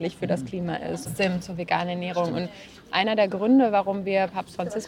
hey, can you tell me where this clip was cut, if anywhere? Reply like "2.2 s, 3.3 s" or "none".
1.0 s